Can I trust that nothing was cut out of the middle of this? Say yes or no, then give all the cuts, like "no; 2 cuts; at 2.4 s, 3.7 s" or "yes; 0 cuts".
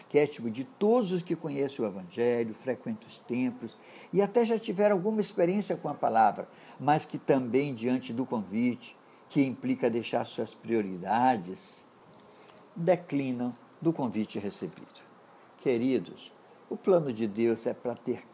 yes; 0 cuts